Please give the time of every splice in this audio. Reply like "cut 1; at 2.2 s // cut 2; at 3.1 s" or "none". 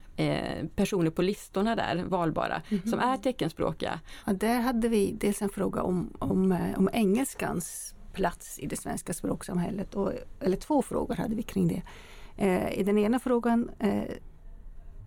cut 1; at 4.2 s